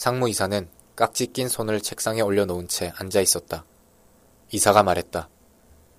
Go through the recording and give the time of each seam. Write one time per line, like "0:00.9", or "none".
0:04.4